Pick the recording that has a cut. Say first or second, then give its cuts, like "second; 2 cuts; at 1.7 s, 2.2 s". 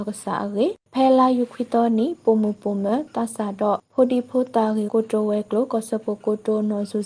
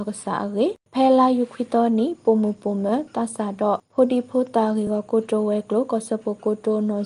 first; 1 cut; at 4.9 s